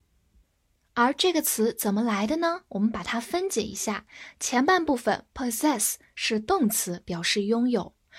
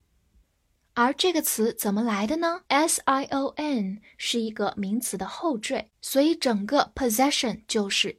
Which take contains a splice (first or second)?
second